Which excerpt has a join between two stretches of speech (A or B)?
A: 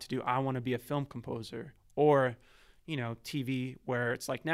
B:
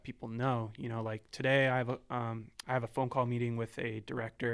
B